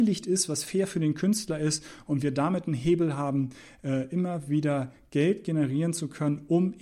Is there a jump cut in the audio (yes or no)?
no